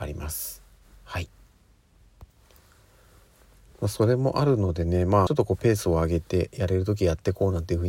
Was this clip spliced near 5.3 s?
yes; 1 cut; at 5.3 s

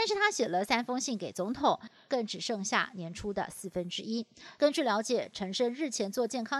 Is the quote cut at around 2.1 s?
yes; 2 cuts; at 2.1 s, 4.6 s

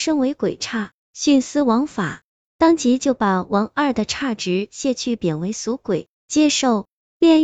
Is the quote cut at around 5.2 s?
no; 1 cut; at 2.4 s

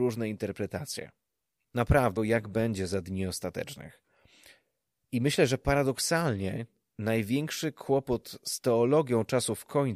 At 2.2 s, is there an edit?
yes; 1 cut; at 2.2 s

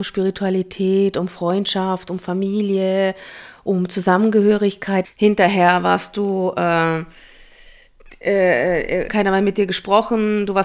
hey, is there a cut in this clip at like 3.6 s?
no; 2 cuts; at 5.0 s, 9.1 s

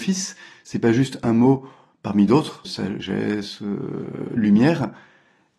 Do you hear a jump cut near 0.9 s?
no; 1 cut; at 2.6 s

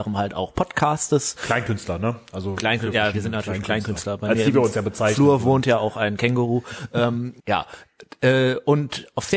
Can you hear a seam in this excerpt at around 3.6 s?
no; 1 cut; at 7.4 s

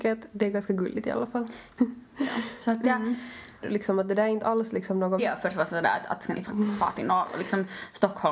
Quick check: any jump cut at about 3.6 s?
yes; 3 cuts; at 1.8 s, 3.6 s, 5.2 s

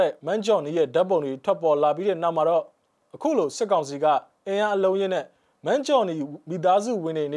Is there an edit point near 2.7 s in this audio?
no; 0 cuts

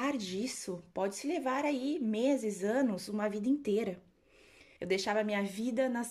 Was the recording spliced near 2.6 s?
no; 1 cut; at 4.8 s

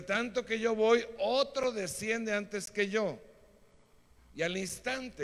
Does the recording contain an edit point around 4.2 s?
yes; 1 cut; at 4.2 s

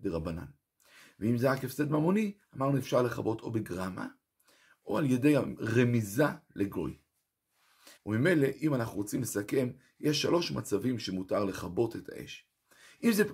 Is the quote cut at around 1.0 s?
no; 1 cut; at 8.0 s

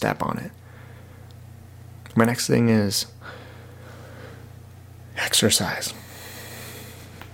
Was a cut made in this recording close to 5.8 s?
no; 1 cut; at 2.1 s

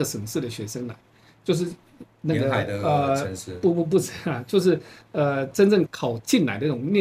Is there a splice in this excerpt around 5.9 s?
yes; 1 cut; at 5.9 s

